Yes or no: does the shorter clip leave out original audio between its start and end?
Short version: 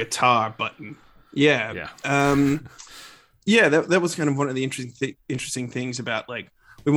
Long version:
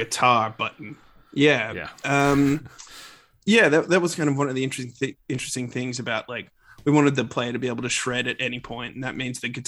no